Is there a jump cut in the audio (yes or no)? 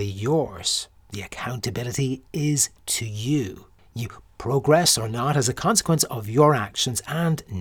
no